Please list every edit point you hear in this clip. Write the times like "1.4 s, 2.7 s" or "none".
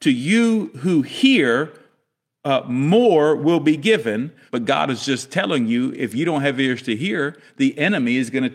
4.5 s